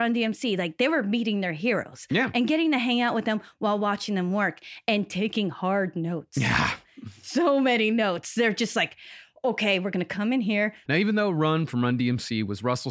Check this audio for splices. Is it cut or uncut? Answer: cut